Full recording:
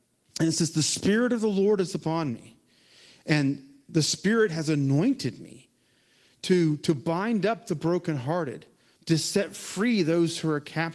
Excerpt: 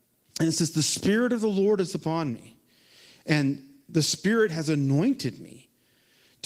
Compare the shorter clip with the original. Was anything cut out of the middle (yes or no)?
no